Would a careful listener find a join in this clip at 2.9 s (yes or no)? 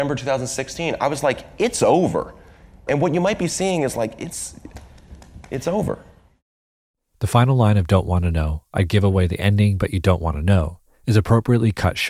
yes